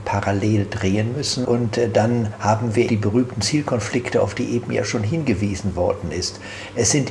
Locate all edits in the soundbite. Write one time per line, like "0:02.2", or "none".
0:01.4
0:02.9